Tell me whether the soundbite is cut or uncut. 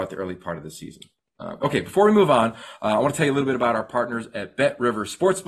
uncut